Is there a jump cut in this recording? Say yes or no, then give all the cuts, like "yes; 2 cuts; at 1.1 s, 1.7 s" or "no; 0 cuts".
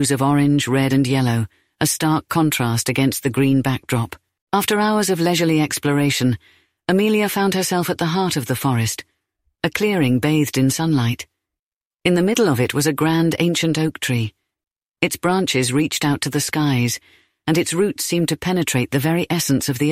no; 0 cuts